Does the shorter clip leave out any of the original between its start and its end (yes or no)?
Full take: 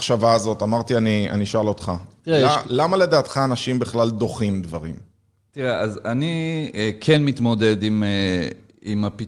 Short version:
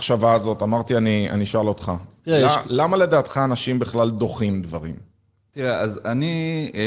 no